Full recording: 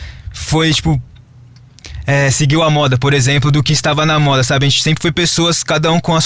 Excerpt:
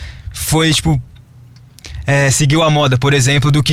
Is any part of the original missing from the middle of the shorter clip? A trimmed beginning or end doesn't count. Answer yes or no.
no